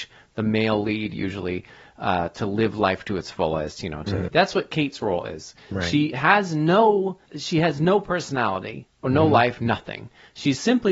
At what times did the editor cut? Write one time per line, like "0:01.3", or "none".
0:04.3
0:07.3
0:09.6

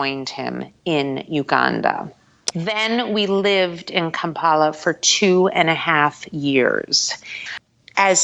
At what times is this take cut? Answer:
0:02.5

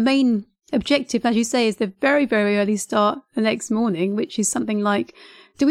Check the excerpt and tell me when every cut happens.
none

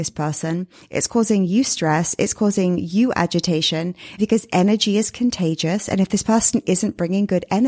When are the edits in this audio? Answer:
0:04.2

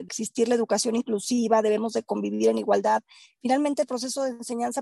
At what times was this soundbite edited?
none

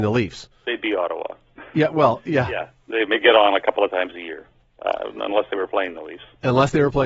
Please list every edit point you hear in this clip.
none

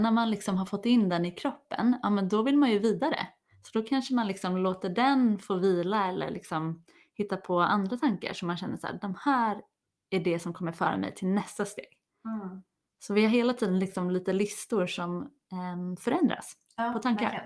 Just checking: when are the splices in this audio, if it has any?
none

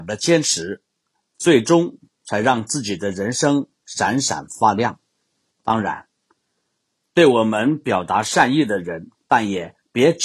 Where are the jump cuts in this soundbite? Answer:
0:05.5
0:09.1

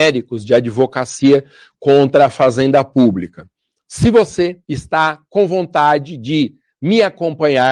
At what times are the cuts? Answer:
0:04.6

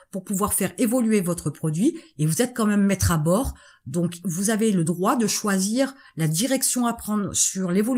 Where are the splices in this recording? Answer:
none

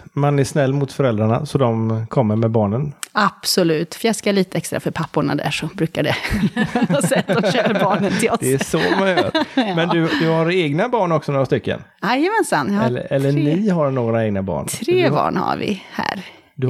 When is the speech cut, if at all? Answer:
none

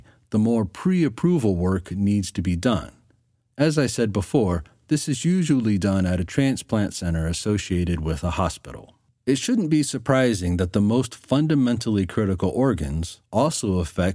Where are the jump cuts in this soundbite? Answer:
0:13.2

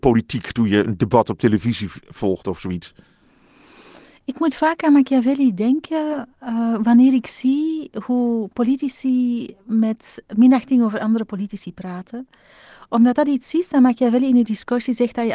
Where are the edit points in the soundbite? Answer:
none

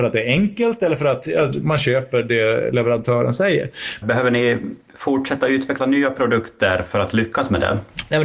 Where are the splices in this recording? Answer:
0:04.0

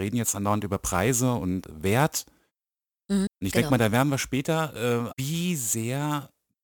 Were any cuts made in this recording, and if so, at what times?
0:01.6
0:03.3
0:05.1

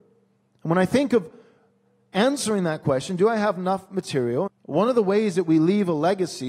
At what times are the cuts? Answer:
0:04.5

